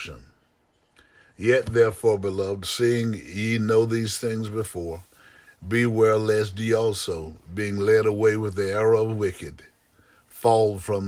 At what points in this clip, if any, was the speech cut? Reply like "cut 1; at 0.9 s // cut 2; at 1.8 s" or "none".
none